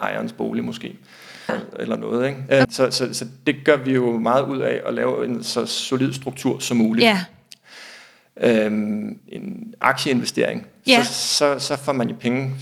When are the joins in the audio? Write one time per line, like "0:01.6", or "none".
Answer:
0:01.5
0:02.6
0:09.2